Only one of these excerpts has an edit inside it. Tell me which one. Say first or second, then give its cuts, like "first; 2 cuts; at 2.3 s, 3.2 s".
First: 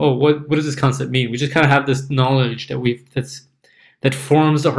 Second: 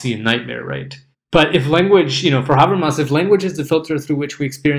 second; 1 cut; at 1.1 s